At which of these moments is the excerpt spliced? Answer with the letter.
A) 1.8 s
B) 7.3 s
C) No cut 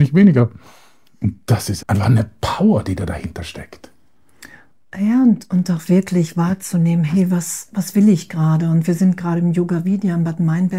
A